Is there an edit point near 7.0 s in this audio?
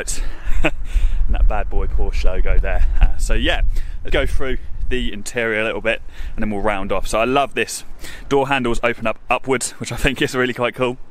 no; 1 cut; at 4.1 s

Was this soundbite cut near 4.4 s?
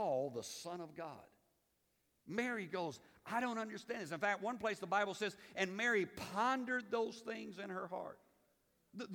no; 0 cuts

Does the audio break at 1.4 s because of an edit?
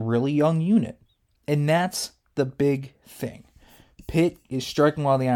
yes; 1 cut; at 1.4 s

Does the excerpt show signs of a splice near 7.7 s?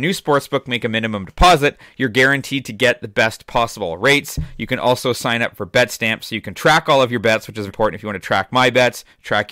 yes; 1 cut; at 7.7 s

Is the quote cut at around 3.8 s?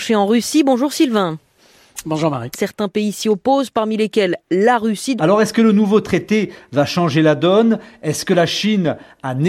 no; 2 cuts; at 2.5 s, 5.2 s

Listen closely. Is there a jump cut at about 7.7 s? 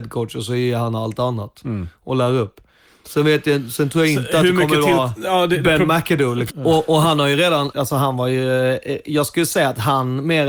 yes; 2 cuts; at 6.5 s, 7.7 s

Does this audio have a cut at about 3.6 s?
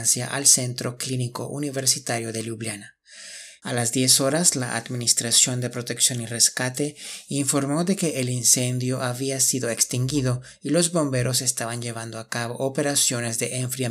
yes; 1 cut; at 3.6 s

